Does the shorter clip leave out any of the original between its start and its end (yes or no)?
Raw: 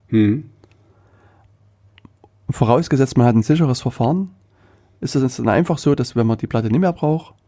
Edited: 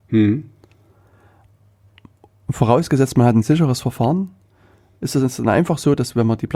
no